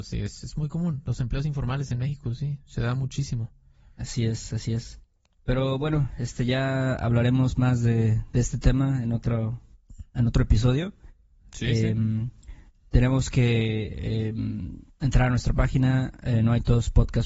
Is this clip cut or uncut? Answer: cut